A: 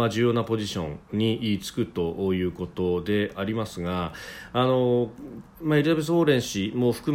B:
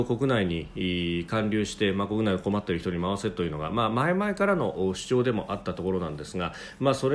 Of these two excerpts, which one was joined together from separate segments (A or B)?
A